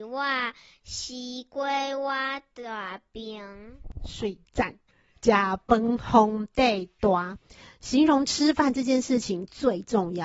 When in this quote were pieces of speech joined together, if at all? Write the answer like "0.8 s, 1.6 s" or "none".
none